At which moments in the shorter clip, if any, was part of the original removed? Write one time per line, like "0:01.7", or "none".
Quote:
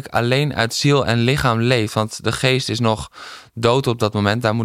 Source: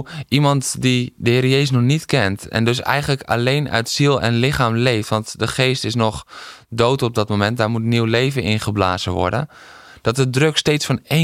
none